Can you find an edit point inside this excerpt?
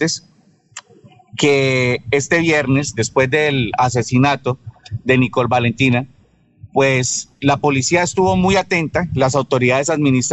no; 0 cuts

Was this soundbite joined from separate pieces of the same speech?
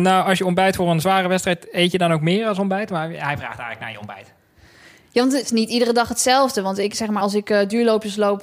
no; 0 cuts

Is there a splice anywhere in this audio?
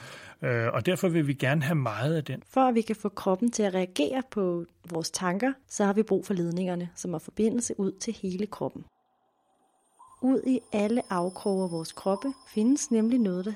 yes; 2 cuts; at 2.4 s, 5.6 s

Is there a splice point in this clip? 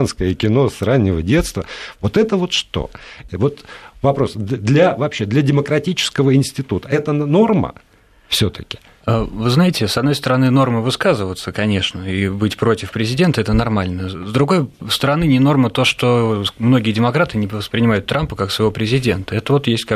yes; 1 cut; at 3.3 s

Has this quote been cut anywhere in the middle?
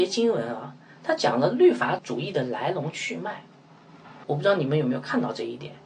yes; 2 cuts; at 2.0 s, 4.2 s

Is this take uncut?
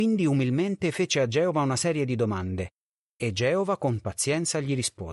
yes; 0 cuts

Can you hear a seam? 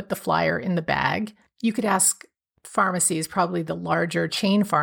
no; 0 cuts

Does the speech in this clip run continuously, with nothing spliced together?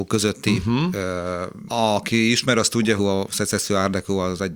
no; 2 cuts; at 1.7 s, 3.0 s

